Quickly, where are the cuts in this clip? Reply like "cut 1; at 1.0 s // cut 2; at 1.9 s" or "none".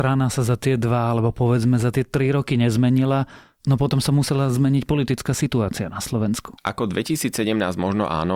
cut 1; at 6.6 s